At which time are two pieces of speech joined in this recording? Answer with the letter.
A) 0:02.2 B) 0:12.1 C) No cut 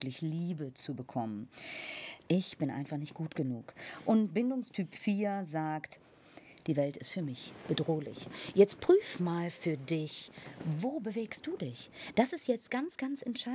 A